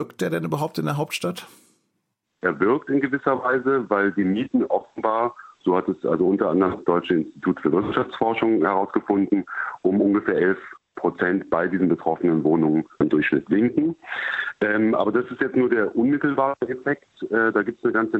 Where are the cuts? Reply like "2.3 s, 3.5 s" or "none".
none